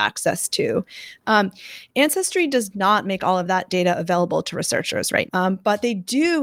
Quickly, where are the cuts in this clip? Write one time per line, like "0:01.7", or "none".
0:01.2
0:05.3